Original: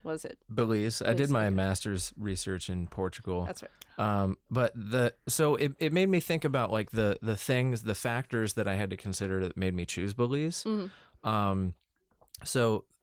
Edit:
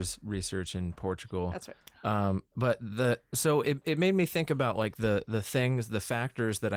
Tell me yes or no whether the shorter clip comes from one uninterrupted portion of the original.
yes